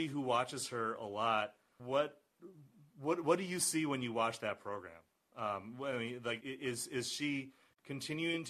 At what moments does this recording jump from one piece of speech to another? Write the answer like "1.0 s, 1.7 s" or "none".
1.8 s, 6.4 s